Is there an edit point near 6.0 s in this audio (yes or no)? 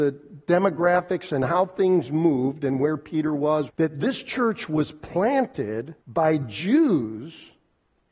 yes